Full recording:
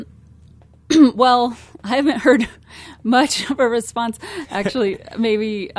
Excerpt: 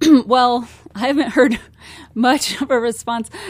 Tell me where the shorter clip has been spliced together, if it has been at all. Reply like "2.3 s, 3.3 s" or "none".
none